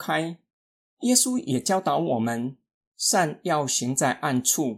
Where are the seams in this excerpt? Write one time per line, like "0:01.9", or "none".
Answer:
none